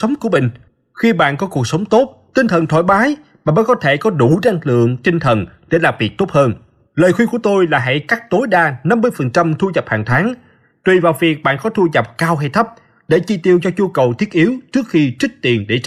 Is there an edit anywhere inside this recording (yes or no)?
no